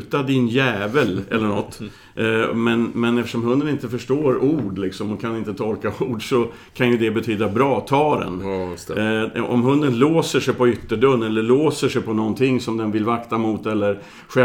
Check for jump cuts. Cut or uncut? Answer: uncut